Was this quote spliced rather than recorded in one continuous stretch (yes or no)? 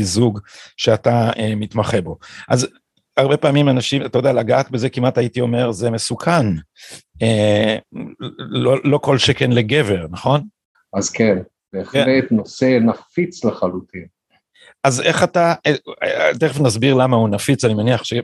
yes